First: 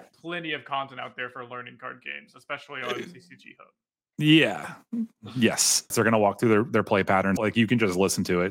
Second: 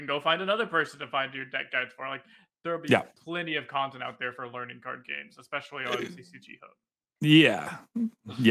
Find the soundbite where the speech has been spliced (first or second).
first